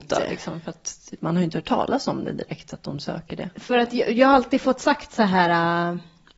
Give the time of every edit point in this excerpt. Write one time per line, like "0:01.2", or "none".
0:03.5